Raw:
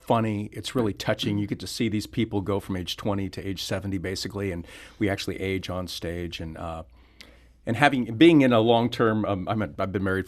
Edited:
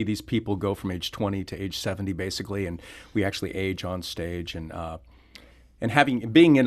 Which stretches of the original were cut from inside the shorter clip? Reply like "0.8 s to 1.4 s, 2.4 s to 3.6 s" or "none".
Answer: none